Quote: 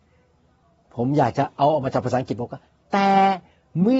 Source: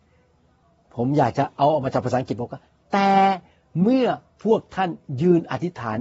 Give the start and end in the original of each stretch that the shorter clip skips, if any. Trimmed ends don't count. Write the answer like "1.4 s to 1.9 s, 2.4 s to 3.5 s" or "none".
none